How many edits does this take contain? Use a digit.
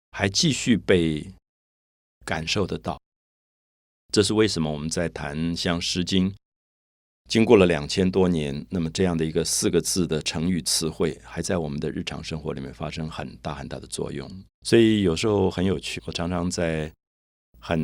2